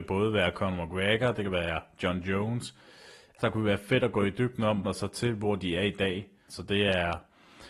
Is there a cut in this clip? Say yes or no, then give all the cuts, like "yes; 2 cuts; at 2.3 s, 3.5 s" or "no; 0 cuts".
yes; 3 cuts; at 3.4 s, 4.8 s, 6.5 s